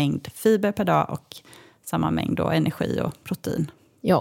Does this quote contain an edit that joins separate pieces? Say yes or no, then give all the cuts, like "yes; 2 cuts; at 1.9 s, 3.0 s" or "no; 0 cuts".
no; 0 cuts